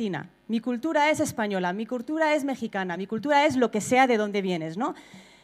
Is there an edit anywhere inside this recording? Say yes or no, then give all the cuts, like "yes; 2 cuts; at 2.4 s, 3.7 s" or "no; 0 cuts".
no; 0 cuts